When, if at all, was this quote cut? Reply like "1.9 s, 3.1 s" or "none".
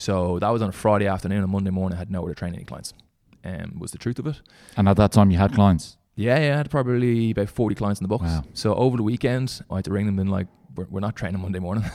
9.7 s